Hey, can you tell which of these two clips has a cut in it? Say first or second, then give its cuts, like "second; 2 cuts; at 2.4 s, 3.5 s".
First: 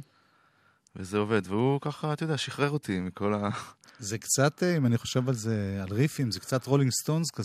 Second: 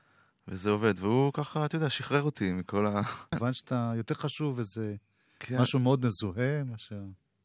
second; 1 cut; at 3.3 s